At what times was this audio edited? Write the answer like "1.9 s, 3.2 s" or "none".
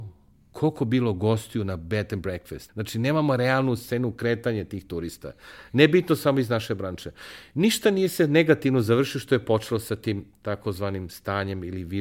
2.7 s